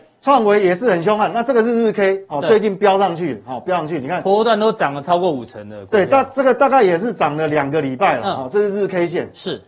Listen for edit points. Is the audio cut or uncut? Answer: uncut